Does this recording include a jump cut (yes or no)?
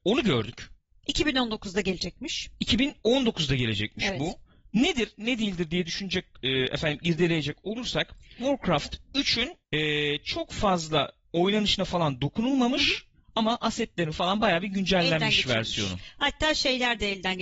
yes